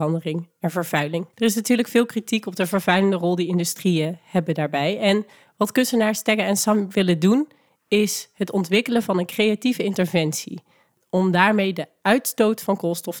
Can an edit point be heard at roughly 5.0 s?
no; 1 cut; at 1.3 s

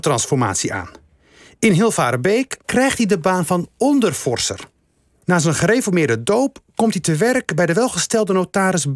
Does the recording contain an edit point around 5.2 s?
yes; 2 cuts; at 2.6 s, 5.2 s

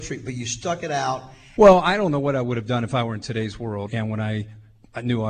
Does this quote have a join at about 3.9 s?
yes; 2 cuts; at 1.6 s, 3.9 s

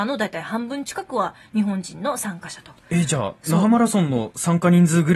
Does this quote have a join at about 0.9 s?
no; 0 cuts

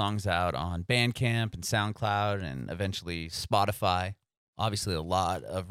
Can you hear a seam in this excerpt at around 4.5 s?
yes; 1 cut; at 4.5 s

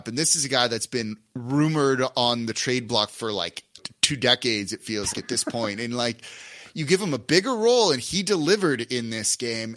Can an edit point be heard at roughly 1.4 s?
no; 2 cuts; at 3.8 s, 5.1 s

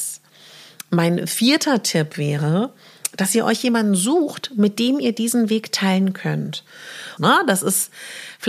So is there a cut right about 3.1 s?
no; 1 cut; at 7.2 s

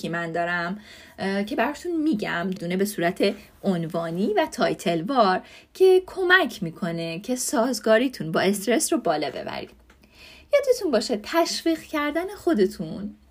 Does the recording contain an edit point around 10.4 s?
no; 1 cut; at 2.6 s

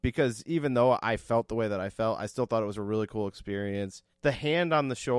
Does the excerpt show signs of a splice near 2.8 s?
no; 1 cut; at 4.1 s

